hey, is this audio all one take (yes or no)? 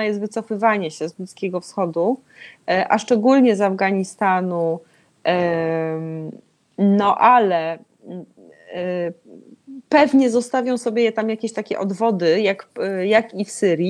yes